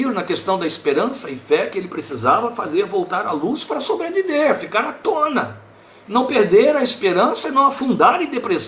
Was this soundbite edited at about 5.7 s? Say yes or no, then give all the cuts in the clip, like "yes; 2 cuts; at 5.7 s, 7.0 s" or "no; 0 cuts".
no; 0 cuts